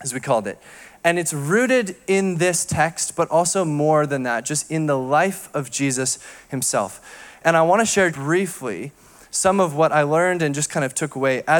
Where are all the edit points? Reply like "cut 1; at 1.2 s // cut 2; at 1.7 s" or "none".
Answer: cut 1; at 8.1 s